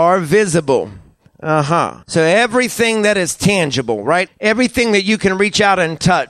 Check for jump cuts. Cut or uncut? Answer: cut